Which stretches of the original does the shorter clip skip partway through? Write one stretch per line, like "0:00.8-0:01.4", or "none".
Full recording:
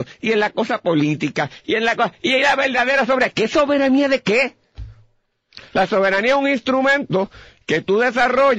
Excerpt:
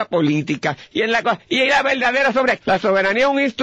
0:03.3-0:05.7